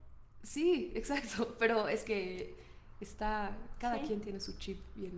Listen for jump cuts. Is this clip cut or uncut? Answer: uncut